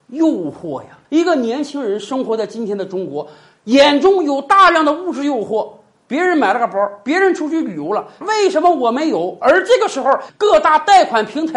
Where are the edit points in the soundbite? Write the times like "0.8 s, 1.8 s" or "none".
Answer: 1.0 s, 8.2 s, 10.3 s